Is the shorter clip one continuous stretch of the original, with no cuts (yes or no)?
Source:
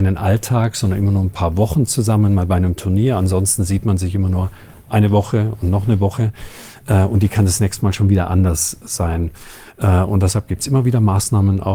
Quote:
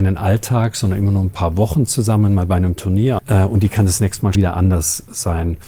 no